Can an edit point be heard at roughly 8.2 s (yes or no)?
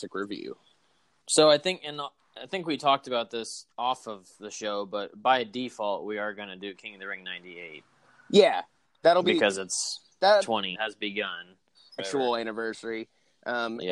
no